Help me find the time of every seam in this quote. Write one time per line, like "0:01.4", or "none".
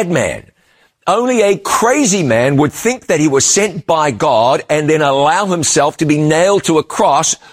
none